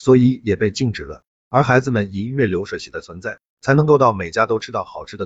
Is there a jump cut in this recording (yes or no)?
yes